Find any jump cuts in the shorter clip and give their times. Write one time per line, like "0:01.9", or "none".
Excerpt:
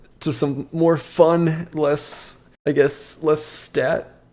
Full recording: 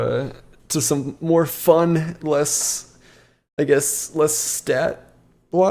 0:02.6